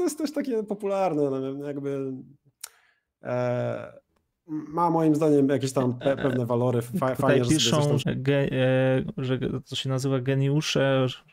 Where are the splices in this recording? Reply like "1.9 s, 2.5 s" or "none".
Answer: 8.0 s

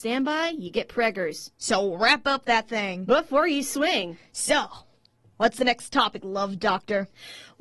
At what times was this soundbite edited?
none

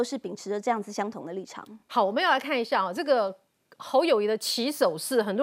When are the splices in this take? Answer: none

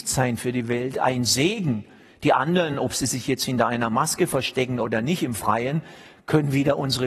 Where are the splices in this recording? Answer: none

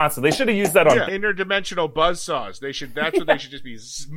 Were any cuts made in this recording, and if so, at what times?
1.1 s

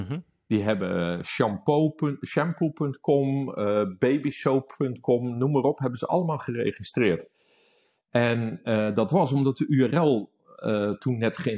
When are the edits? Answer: none

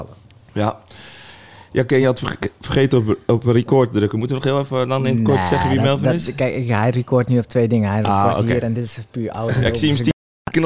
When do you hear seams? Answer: none

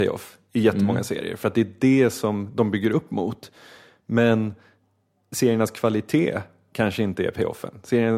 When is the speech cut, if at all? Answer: none

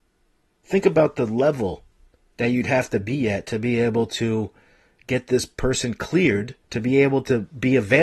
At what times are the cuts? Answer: 6.6 s

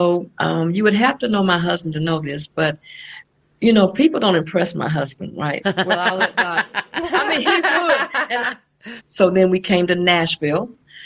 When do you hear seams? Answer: 5.6 s, 9.0 s

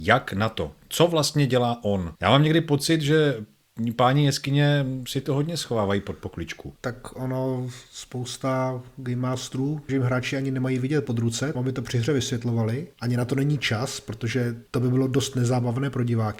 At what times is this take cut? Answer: 9.9 s, 11.5 s

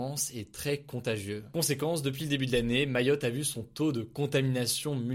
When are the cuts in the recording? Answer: none

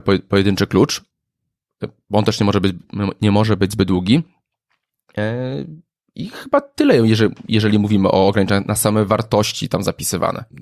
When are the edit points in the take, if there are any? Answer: none

